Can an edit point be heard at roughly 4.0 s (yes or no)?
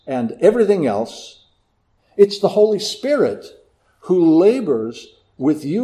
no